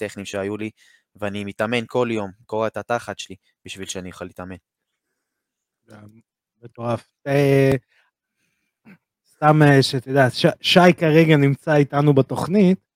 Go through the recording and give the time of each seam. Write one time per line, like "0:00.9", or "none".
none